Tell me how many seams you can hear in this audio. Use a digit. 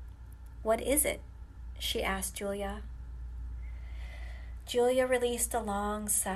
0